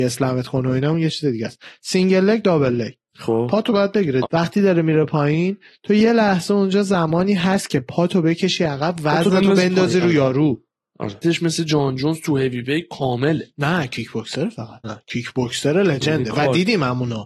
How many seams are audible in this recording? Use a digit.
3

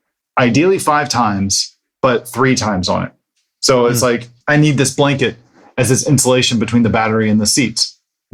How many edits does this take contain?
1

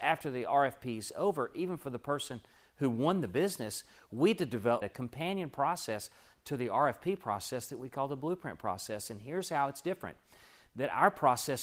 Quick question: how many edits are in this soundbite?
1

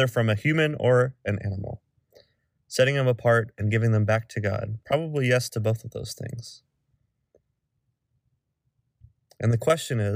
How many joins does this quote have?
1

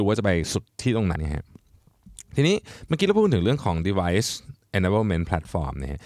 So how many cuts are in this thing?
1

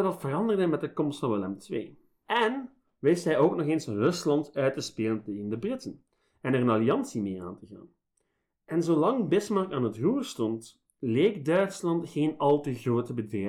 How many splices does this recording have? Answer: 1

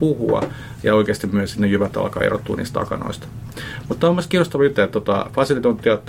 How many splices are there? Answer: 1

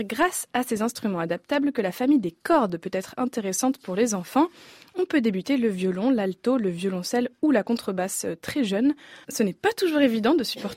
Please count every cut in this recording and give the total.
1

